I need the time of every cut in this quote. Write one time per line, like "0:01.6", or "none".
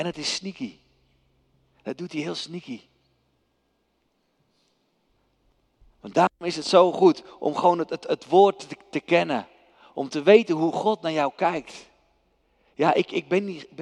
none